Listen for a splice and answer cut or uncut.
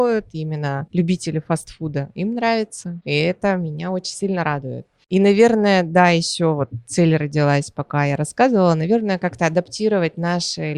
uncut